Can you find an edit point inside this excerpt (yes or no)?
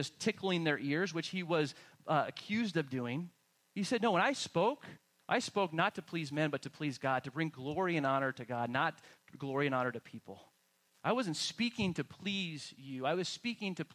yes